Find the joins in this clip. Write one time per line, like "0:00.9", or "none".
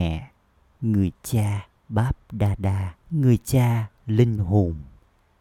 0:01.8
0:03.0